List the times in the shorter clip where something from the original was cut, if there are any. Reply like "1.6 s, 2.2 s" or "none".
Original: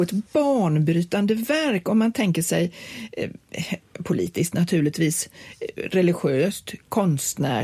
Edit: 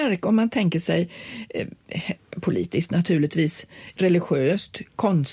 4.0 s